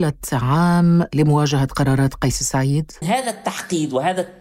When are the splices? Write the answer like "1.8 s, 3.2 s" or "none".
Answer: 3.0 s